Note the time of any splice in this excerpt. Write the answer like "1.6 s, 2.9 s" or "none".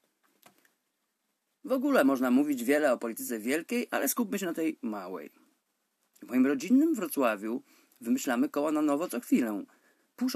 none